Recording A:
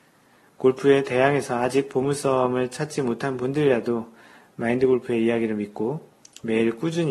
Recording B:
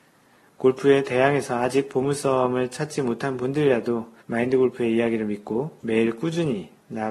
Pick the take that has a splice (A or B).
B